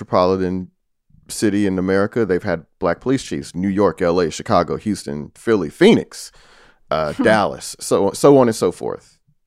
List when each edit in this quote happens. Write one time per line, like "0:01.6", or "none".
none